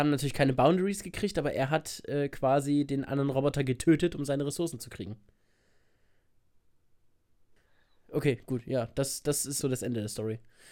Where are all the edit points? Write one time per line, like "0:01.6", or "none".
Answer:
0:09.6